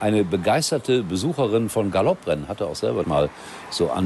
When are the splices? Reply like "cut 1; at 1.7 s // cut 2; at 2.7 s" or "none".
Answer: cut 1; at 3.0 s